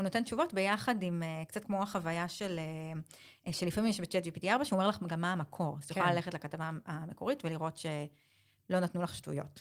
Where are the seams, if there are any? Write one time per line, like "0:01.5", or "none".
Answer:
0:01.6